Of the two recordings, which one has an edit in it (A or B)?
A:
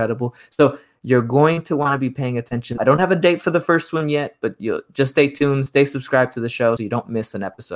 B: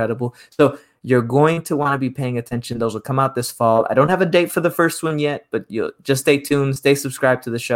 A